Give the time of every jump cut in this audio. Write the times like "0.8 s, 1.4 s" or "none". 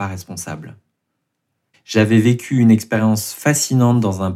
1.7 s